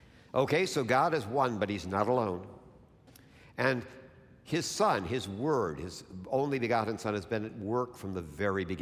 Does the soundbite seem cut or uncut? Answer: uncut